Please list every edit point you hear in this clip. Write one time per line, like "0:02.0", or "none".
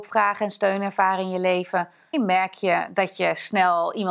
0:02.1

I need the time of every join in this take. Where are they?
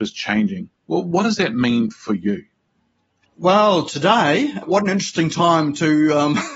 none

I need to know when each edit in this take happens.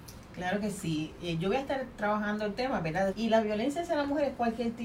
0:03.1

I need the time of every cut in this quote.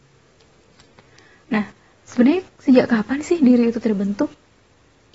0:01.9

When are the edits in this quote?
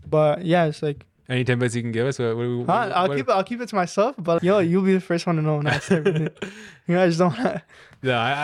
0:04.4

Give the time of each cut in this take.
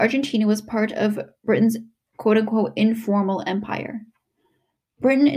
none

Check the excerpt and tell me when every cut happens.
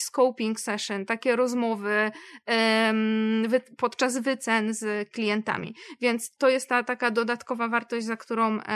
0:06.4

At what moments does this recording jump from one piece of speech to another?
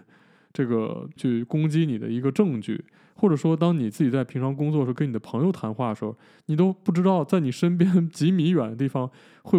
0:01.2

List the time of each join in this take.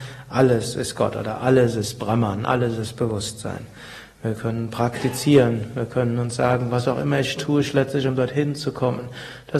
0:07.4

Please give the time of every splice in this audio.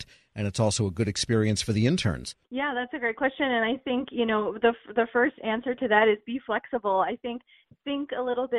none

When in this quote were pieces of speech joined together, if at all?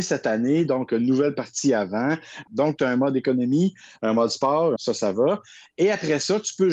0:02.5
0:04.8

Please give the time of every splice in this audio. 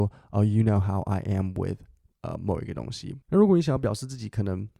0:03.2

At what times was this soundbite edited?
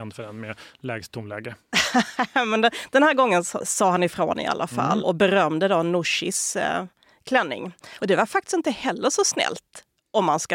0:05.0
0:08.0

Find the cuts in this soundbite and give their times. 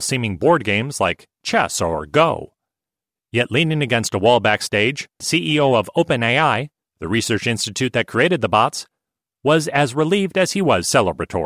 0:05.2

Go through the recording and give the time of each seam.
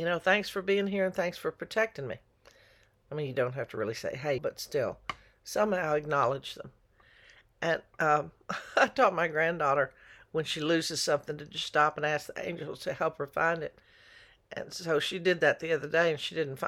0:04.4

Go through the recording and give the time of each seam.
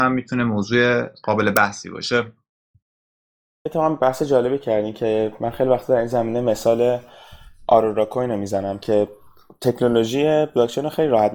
none

